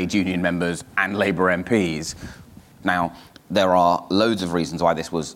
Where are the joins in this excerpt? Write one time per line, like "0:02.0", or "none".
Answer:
0:02.8

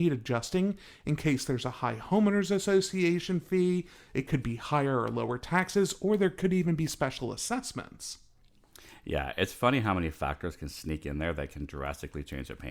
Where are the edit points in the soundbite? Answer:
none

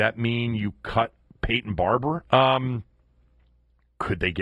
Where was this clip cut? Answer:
0:02.2

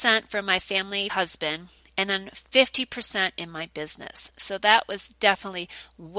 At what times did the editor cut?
0:01.1

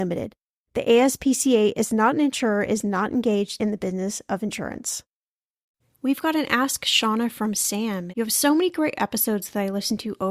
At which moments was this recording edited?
0:08.1

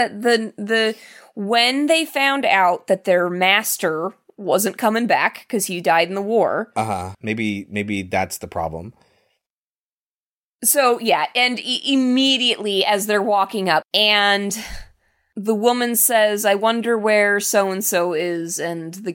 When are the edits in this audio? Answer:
0:07.1
0:10.5
0:13.8

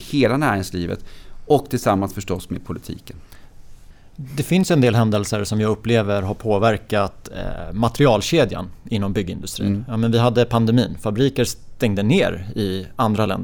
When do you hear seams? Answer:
none

